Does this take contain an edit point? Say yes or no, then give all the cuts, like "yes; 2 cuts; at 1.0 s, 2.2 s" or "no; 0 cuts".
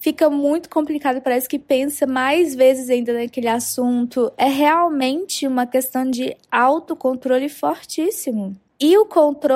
no; 0 cuts